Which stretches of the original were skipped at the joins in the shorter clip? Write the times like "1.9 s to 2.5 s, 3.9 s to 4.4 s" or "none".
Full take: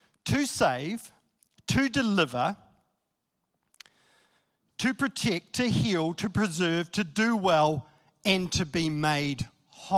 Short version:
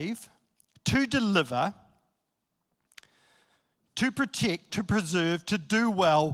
5.5 s to 6.2 s